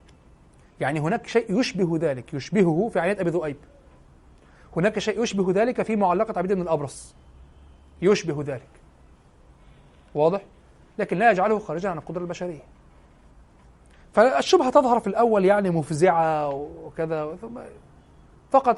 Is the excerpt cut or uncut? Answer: uncut